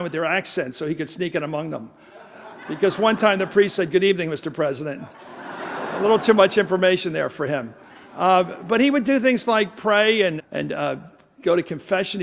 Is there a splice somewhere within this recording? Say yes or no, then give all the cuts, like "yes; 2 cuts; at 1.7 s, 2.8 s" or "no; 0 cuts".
yes; 1 cut; at 10.4 s